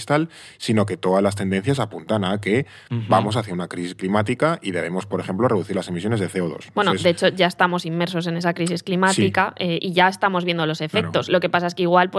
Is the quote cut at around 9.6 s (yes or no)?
no